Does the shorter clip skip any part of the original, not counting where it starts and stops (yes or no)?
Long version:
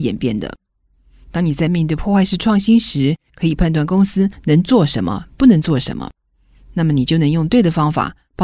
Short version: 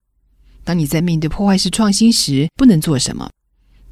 yes